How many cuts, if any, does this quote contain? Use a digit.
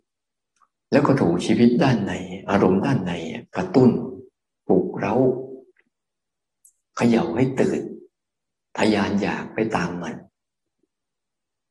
1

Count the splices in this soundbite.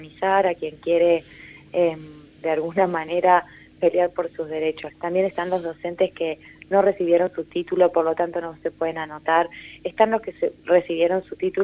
1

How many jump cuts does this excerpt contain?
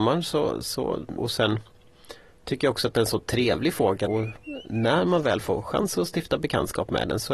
2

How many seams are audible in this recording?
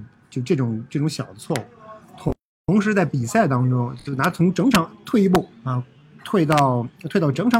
0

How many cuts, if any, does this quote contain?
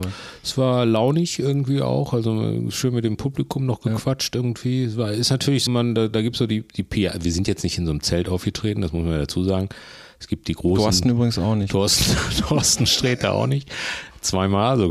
1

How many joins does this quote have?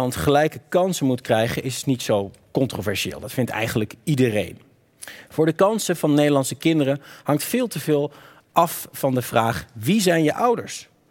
1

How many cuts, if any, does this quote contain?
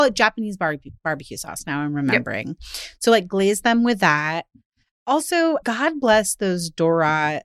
1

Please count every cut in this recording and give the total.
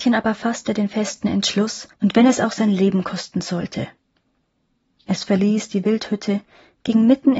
1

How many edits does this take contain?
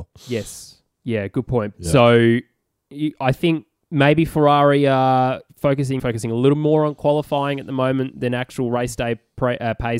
2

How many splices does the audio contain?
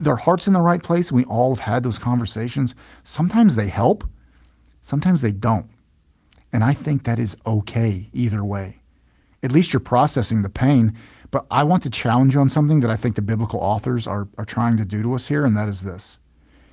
0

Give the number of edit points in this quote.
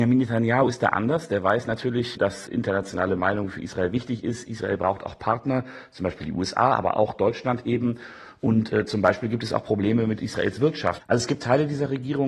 1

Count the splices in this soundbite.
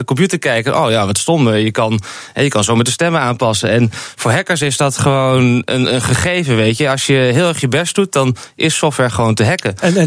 0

